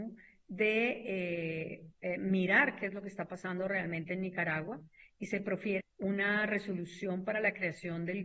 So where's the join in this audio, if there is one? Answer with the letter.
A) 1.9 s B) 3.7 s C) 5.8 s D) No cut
C